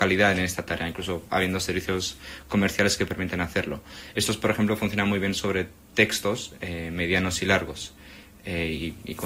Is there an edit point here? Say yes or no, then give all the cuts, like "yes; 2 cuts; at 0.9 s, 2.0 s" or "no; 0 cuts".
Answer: no; 0 cuts